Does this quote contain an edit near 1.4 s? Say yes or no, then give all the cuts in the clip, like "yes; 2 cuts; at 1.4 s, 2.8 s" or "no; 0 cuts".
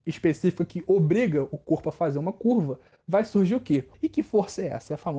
no; 1 cut; at 3.9 s